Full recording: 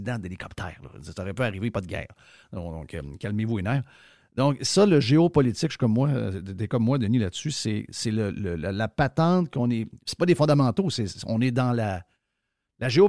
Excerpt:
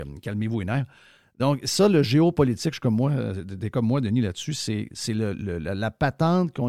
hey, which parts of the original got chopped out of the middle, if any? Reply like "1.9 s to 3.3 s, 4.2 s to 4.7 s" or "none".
none